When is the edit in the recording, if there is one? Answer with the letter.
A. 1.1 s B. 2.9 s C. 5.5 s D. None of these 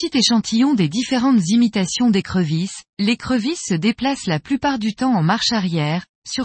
B